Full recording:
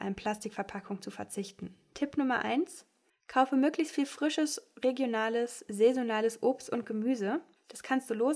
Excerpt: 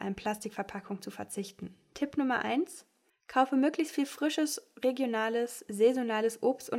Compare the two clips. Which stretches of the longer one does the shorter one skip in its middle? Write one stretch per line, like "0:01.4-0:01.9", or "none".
none

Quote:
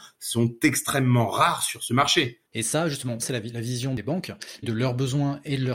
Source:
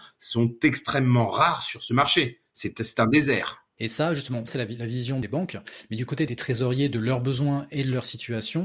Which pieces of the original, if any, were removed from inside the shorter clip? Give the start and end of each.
0:02.5-0:03.7
0:05.9-0:06.9

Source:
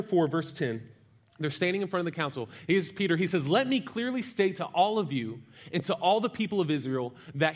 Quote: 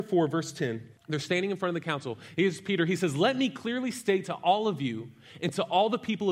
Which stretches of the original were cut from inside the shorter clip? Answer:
0:01.0-0:01.3

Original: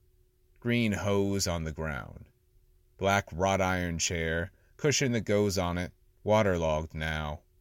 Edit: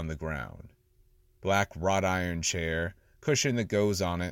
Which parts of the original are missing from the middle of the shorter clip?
none

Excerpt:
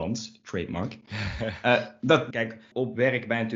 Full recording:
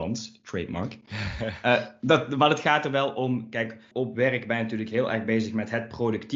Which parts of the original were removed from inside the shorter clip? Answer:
0:02.3-0:03.5

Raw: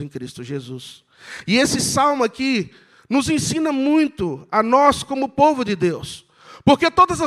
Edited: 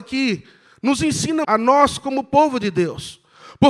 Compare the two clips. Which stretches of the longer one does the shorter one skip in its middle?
0:03.7-0:04.5

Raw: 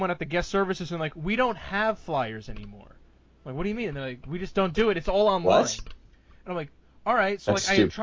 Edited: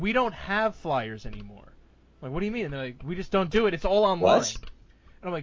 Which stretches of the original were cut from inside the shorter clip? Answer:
none

